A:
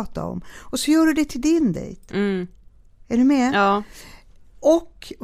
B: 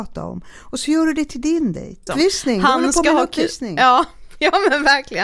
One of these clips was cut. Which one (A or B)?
B